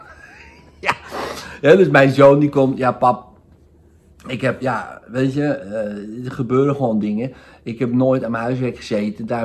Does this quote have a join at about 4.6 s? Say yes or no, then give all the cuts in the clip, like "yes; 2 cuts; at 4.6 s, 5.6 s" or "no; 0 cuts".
yes; 1 cut; at 4.6 s